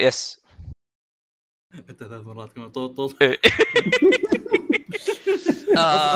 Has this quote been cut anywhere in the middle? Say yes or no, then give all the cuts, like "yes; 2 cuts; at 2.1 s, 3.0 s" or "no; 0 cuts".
yes; 2 cuts; at 1.6 s, 2.7 s